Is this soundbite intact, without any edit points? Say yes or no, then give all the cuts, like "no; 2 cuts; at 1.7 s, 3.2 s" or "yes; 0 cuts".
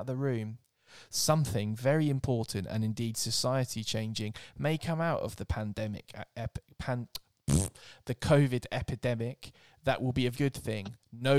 no; 1 cut; at 10.3 s